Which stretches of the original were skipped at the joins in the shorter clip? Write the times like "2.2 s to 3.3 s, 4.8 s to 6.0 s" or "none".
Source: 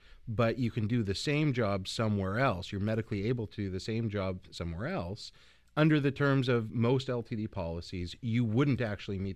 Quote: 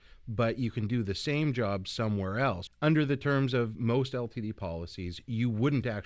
2.7 s to 5.6 s